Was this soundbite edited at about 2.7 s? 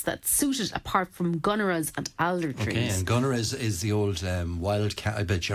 no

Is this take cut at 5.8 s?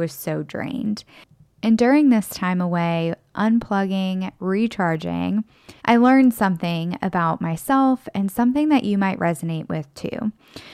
yes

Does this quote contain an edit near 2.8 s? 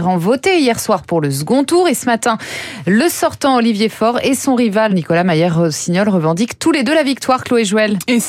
no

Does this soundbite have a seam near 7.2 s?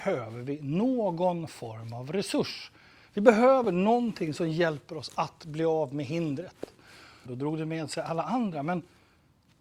yes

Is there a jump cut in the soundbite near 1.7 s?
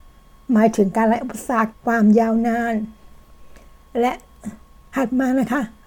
yes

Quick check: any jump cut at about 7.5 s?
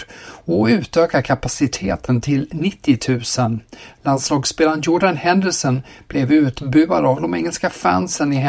no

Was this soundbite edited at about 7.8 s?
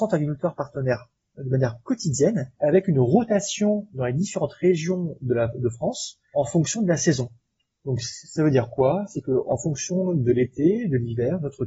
no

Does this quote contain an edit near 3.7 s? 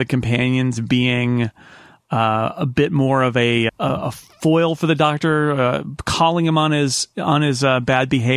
yes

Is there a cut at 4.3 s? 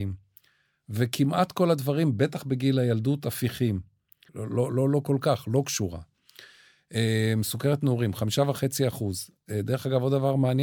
yes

